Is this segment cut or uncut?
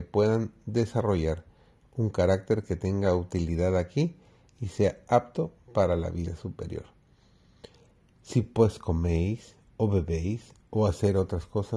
uncut